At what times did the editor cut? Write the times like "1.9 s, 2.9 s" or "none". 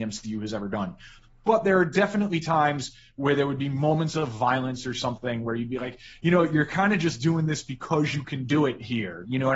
none